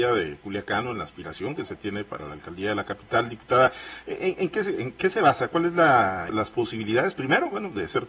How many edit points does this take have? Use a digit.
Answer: 1